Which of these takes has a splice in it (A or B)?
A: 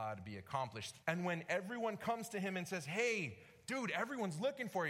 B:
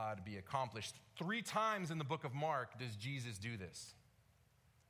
A